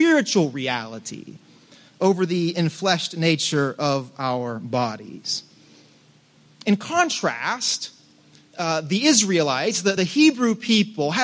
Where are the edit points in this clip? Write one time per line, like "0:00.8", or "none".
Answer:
none